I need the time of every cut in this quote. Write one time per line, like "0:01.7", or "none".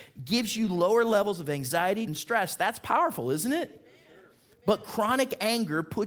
0:02.1